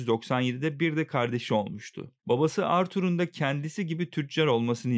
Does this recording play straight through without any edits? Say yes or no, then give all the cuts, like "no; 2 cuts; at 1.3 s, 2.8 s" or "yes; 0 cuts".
no; 1 cut; at 2.2 s